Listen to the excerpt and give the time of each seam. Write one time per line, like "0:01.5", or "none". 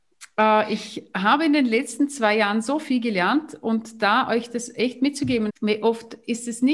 0:05.5